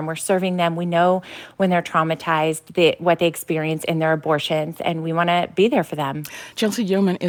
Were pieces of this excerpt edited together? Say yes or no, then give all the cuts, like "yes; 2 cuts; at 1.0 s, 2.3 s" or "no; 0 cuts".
no; 0 cuts